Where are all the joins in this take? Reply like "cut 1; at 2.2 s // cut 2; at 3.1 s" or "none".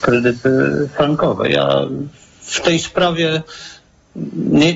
none